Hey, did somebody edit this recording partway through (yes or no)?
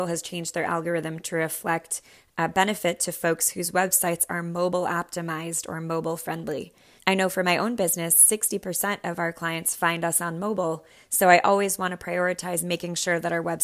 yes